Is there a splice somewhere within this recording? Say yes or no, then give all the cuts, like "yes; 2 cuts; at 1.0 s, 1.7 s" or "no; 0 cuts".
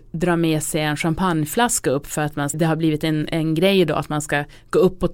yes; 1 cut; at 2.5 s